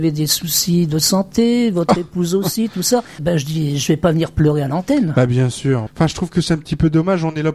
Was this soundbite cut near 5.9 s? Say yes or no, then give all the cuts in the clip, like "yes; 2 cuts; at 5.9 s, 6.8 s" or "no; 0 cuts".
yes; 2 cuts; at 3.2 s, 5.9 s